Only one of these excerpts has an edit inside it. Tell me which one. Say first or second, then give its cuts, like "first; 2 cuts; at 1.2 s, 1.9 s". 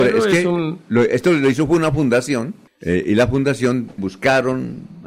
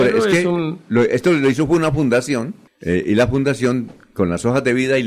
first; 1 cut; at 4.0 s